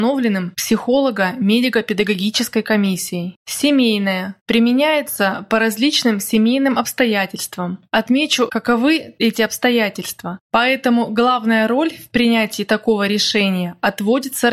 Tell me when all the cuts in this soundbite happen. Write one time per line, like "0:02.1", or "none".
0:08.5